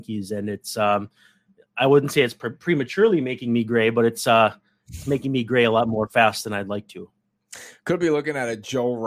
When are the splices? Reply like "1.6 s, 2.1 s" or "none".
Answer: none